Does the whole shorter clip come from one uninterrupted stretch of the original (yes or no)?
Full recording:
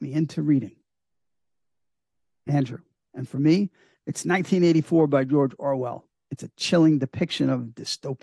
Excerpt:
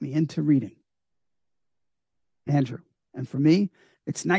yes